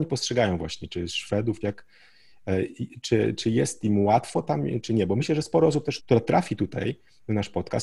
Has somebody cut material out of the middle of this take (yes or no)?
yes